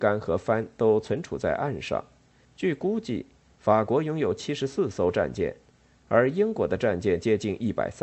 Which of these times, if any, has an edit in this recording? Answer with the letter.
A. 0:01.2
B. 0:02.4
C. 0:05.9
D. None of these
B